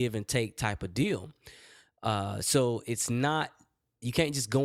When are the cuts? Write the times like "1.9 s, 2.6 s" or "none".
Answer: none

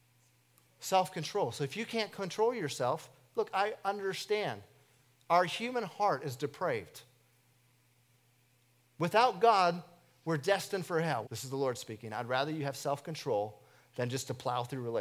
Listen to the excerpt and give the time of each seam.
11.2 s

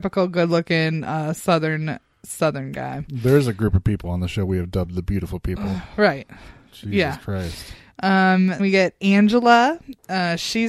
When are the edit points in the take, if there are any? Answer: 8.6 s

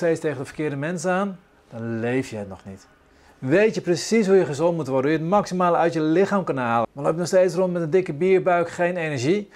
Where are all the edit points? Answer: 6.8 s

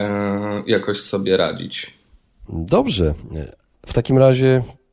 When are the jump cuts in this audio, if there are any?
2.5 s

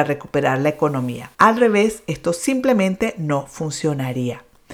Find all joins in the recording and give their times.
1.3 s

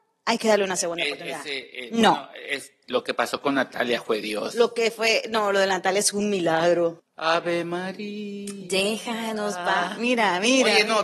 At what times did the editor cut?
7.0 s

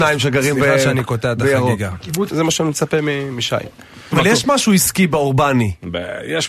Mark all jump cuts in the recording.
2.3 s, 4.1 s

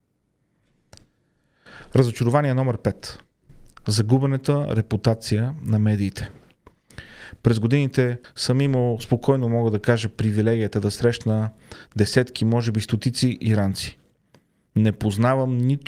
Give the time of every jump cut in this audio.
7.4 s

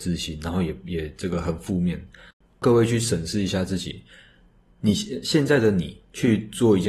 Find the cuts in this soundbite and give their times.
2.4 s

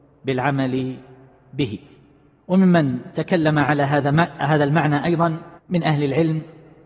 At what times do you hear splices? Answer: 5.6 s

